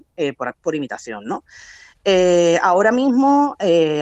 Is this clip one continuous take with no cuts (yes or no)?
yes